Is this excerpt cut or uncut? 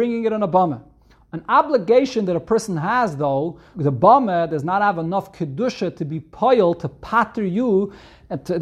cut